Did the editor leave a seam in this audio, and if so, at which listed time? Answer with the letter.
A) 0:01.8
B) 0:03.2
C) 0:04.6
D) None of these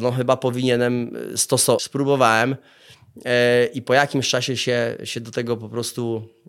A